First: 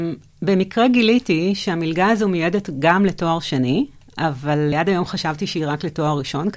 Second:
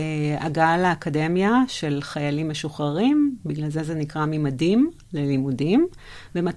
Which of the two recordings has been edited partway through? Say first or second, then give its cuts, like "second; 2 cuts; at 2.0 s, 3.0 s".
first; 1 cut; at 4.7 s